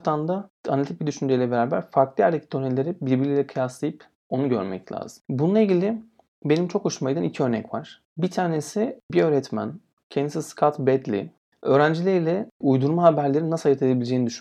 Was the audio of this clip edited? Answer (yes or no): no